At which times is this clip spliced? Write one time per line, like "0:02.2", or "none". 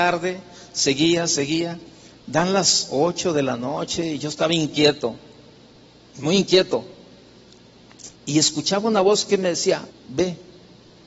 0:08.1
0:09.9